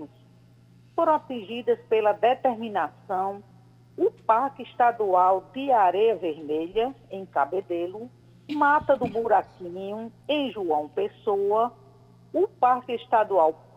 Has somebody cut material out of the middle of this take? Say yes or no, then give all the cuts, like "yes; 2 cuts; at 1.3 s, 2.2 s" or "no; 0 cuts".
no; 0 cuts